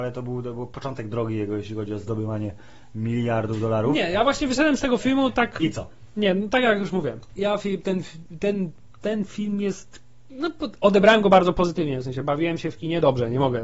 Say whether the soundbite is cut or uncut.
uncut